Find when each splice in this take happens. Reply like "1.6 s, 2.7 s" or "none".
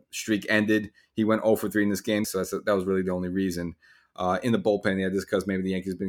2.2 s, 4.1 s